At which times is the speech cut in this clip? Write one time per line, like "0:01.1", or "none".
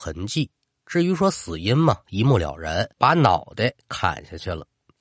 0:02.9

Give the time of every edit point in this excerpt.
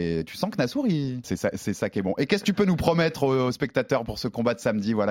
0:01.2

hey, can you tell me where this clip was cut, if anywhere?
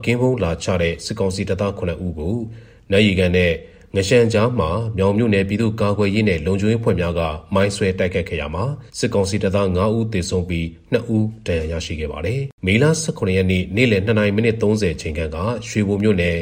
0:08.9
0:12.6

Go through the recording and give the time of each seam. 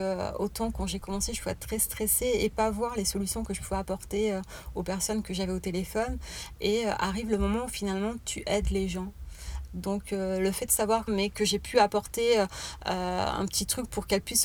0:09.7
0:11.1

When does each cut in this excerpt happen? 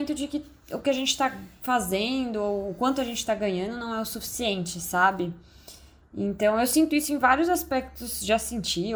none

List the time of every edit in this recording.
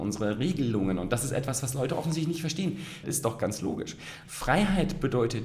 0:03.0
0:04.2

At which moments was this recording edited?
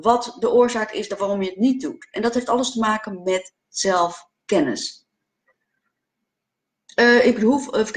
0:02.1

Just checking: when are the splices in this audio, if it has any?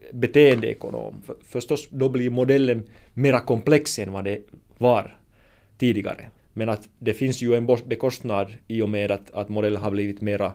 0:01.2
0:06.4
0:08.6

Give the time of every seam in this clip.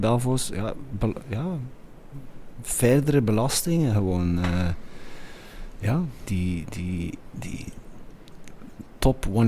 0:06.3

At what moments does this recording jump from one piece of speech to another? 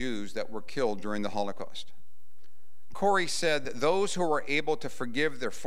0:02.9

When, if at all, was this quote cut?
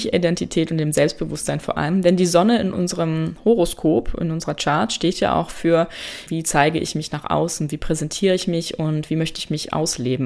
0:06.3

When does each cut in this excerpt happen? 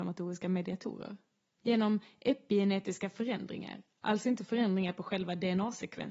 0:01.6

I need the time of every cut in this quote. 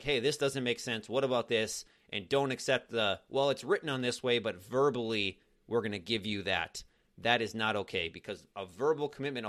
none

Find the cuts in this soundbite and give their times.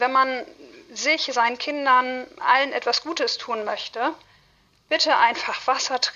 none

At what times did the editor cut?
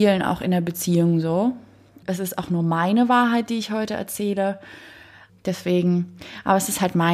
0:02.0
0:05.3

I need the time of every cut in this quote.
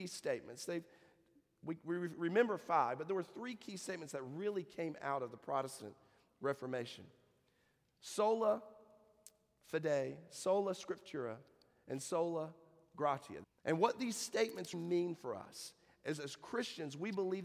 0:13.4
0:14.7

